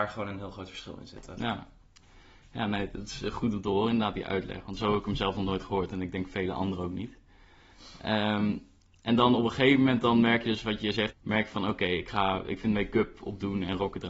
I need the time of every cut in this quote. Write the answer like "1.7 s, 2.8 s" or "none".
11.1 s